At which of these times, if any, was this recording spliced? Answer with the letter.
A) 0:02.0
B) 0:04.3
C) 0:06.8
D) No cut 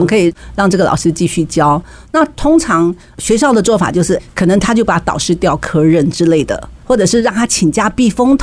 C